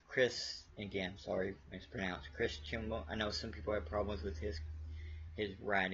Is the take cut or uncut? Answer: uncut